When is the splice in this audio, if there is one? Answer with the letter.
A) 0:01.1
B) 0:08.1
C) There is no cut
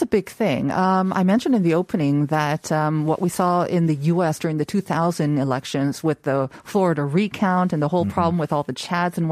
C